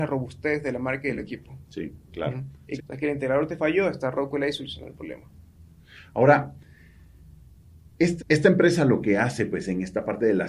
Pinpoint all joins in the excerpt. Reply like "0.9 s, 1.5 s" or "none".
2.8 s, 8.2 s